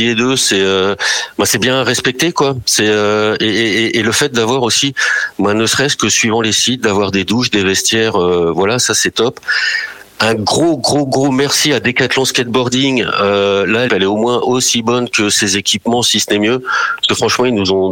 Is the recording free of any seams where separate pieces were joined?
no; 1 cut; at 13.9 s

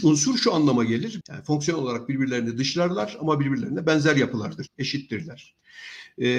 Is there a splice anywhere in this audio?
yes; 2 cuts; at 1.2 s, 4.7 s

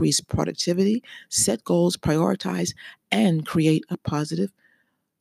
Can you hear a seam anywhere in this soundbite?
no; 0 cuts

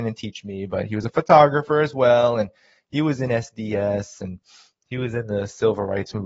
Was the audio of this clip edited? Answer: no; 0 cuts

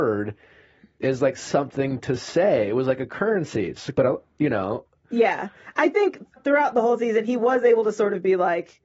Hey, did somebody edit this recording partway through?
yes; 1 cut; at 6.4 s

